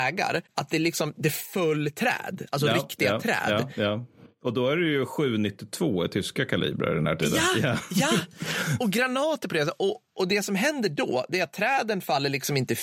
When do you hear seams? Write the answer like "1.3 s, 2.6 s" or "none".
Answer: none